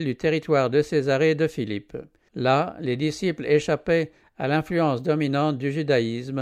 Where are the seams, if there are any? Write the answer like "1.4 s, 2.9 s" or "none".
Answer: 2.3 s